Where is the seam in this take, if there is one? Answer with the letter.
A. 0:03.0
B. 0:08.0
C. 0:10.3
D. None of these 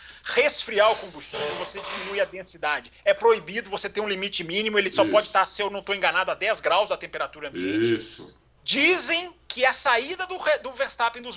D